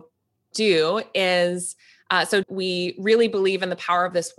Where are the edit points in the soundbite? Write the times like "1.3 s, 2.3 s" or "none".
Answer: 2.4 s

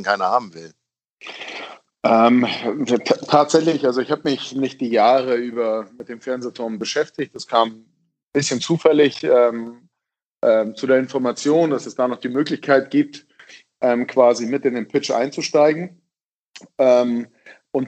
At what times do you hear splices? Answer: none

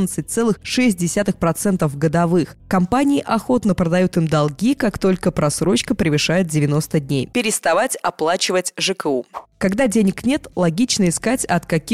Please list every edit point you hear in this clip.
2.6 s, 7.3 s

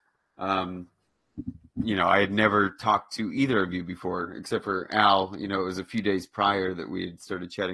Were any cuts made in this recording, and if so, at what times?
1.8 s

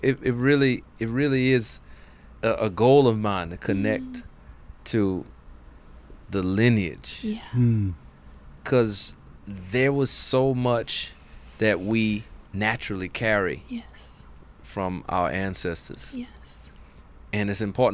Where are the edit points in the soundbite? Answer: 8.6 s, 12.4 s

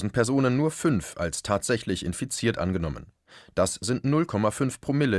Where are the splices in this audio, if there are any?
none

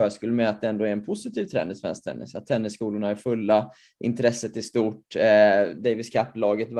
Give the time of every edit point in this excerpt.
none

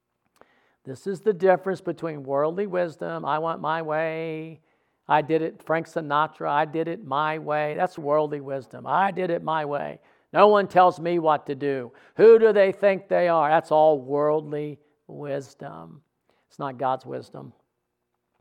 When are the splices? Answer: 8.0 s

